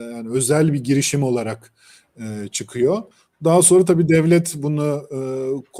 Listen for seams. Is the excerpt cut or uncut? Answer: uncut